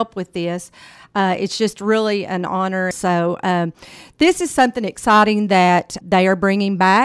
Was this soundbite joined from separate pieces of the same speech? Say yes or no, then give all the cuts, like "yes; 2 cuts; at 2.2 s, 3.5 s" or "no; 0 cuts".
yes; 2 cuts; at 2.9 s, 6.0 s